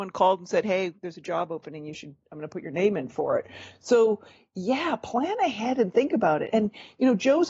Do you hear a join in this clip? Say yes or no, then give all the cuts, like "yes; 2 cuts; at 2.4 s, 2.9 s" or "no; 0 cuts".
no; 0 cuts